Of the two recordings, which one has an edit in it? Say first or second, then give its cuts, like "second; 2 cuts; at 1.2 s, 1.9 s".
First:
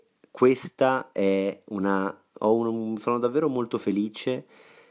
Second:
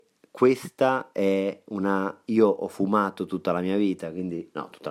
second; 1 cut; at 2.2 s